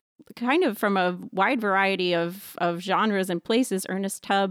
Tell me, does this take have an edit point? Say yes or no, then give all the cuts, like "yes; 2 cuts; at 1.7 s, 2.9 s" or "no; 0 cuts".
no; 0 cuts